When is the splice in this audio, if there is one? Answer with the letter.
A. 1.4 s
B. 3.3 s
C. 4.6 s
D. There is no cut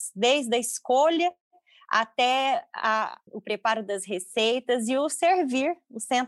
B